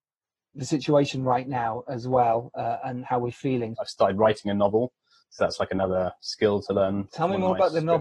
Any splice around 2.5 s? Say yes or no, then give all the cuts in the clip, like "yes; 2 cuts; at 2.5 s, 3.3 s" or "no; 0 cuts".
no; 2 cuts; at 3.8 s, 7.1 s